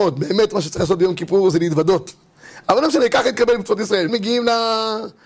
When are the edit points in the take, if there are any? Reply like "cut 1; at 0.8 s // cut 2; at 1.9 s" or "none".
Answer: cut 1; at 2.6 s // cut 2; at 4.1 s